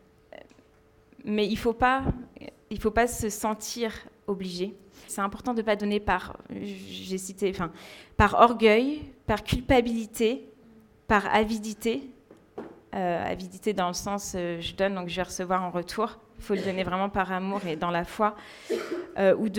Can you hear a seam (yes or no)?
yes